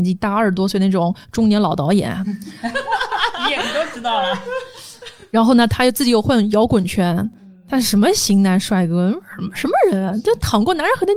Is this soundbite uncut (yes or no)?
yes